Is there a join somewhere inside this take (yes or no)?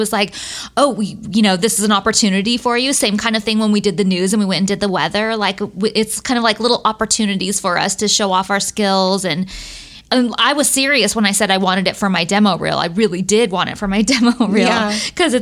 no